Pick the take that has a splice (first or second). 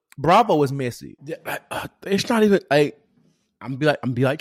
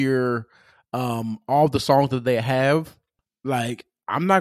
first